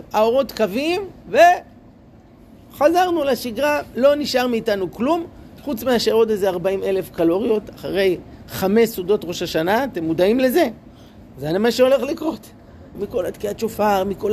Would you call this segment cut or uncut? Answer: cut